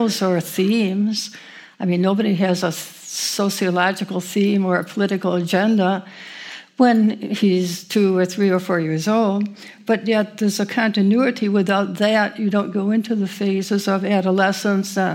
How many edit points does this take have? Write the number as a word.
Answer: zero